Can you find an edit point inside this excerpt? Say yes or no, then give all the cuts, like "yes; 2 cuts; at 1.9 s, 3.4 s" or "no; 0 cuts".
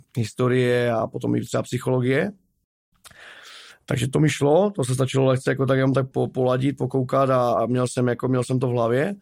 yes; 1 cut; at 6.1 s